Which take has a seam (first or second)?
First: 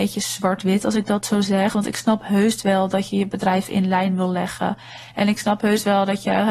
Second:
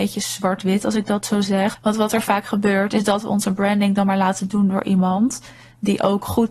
second